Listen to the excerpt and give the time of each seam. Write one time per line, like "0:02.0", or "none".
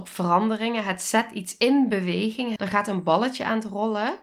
0:02.6